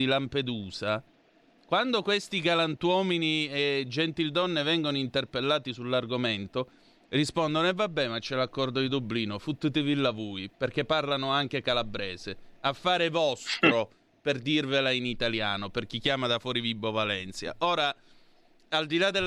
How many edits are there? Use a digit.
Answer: 0